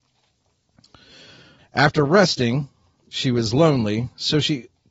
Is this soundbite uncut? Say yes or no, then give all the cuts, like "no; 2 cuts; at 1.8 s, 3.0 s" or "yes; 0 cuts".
no; 1 cut; at 1.6 s